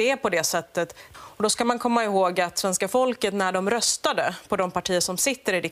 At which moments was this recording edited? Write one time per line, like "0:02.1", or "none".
0:01.1